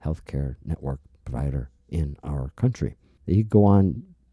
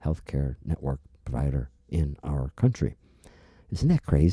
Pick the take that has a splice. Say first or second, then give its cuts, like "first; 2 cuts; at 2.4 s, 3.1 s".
first; 1 cut; at 3.2 s